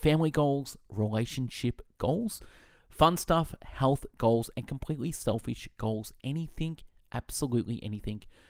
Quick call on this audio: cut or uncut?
uncut